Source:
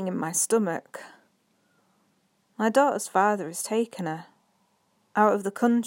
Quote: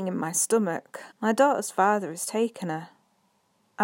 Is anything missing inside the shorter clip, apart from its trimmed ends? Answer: yes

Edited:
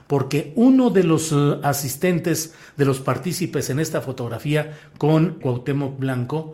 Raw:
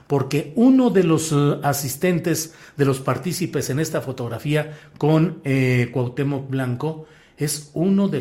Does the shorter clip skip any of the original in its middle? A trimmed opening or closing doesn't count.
yes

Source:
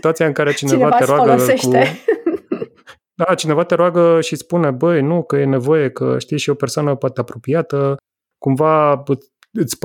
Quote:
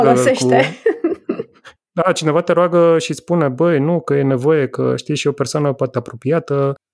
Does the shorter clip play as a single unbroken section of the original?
yes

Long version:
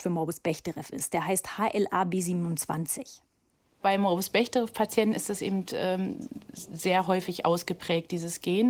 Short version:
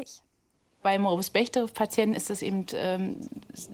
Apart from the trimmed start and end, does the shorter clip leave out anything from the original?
no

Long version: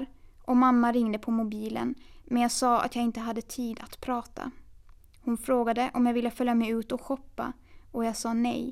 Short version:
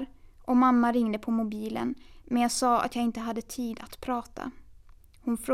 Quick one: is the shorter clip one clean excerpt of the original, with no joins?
yes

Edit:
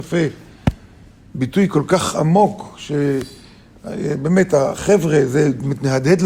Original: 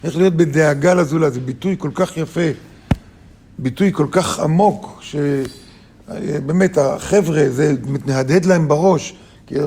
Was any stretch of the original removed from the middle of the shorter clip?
no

